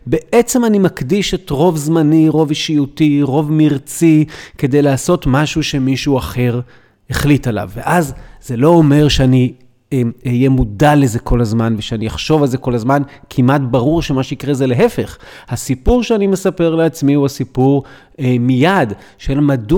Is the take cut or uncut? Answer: uncut